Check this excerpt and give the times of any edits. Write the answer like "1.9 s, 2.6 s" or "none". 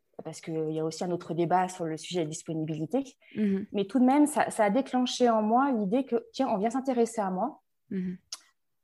none